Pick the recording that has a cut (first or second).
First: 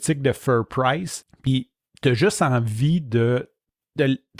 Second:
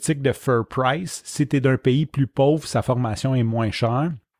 first